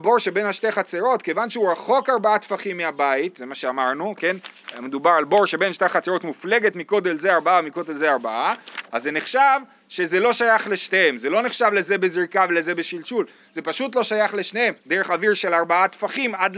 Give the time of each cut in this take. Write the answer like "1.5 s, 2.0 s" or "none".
14.8 s